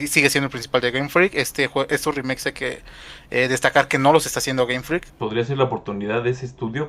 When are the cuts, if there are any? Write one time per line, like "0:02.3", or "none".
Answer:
0:05.1